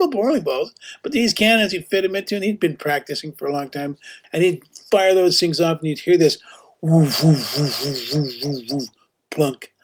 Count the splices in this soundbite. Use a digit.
1